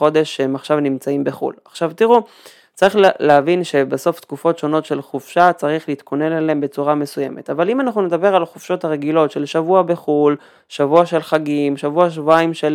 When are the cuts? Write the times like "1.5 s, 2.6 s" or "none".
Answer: none